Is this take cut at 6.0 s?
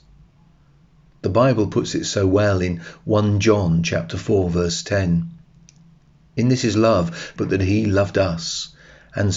no; 1 cut; at 7.4 s

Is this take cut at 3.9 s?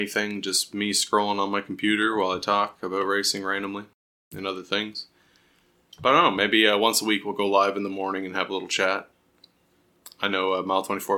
no; 1 cut; at 5.9 s

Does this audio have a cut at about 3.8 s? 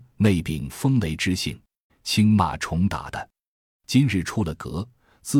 no; 1 cut; at 1.9 s

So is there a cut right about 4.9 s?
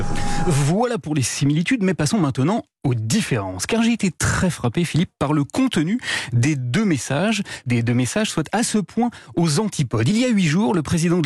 no; 1 cut; at 7.7 s

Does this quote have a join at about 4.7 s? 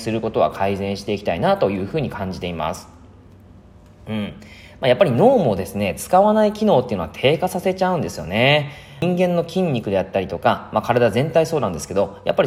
no; 0 cuts

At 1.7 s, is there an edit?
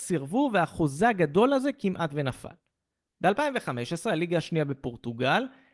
no; 1 cut; at 3.1 s

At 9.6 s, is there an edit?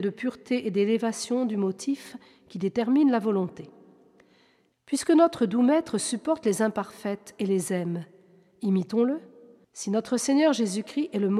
yes; 2 cuts; at 4.7 s, 9.6 s

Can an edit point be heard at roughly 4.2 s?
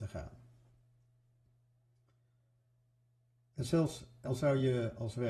yes; 1 cut; at 4.2 s

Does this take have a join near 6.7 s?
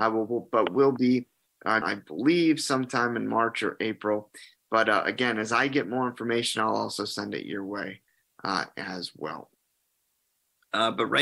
no; 1 cut; at 1.8 s

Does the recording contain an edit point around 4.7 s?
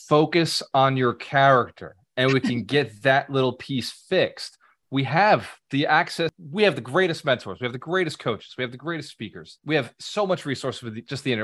no; 0 cuts

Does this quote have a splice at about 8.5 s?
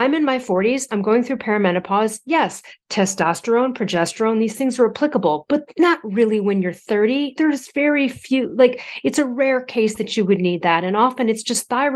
no; 0 cuts

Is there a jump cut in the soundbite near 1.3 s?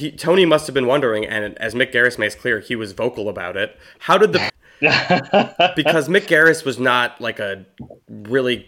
no; 1 cut; at 4.5 s

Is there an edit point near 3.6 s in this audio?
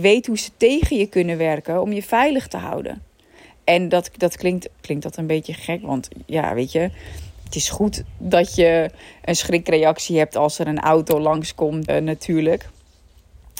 no; 3 cuts; at 4.8 s, 7.4 s, 11.9 s

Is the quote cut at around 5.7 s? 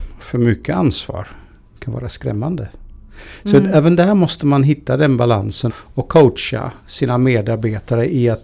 yes; 1 cut; at 5.7 s

